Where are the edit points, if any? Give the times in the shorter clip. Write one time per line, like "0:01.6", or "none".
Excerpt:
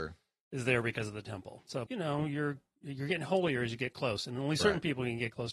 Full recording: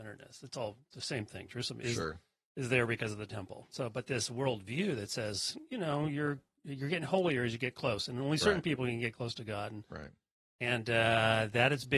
0:01.9